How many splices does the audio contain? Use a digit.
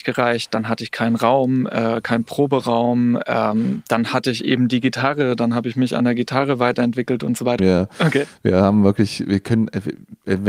1